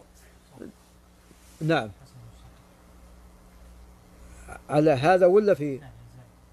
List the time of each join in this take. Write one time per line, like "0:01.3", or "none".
0:05.6